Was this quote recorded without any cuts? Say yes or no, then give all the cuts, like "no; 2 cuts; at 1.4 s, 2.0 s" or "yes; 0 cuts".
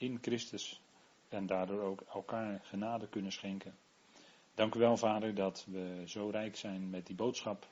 yes; 0 cuts